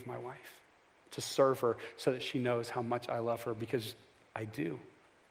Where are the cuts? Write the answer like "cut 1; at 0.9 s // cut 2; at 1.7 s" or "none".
none